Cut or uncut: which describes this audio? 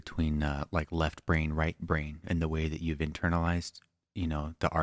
uncut